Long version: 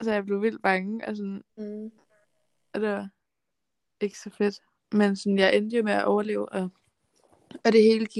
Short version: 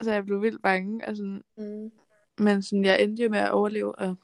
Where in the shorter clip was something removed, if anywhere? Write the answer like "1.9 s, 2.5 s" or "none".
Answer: 2.3 s